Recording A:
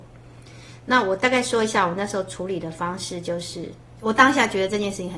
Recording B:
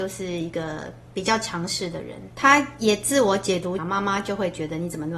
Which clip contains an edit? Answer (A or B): B